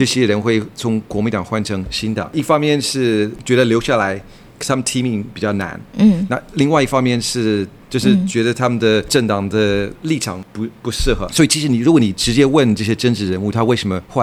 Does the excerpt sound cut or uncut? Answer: uncut